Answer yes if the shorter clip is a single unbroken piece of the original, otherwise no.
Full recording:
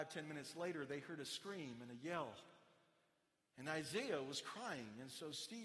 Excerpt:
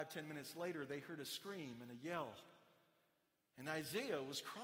yes